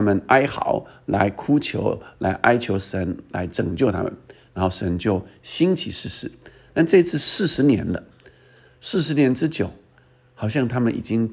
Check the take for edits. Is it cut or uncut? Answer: uncut